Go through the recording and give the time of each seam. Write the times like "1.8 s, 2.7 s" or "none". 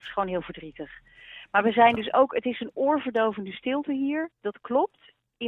none